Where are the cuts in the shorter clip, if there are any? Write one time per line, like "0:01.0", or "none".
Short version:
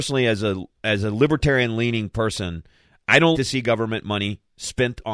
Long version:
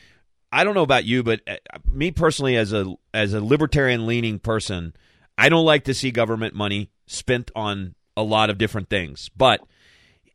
0:03.3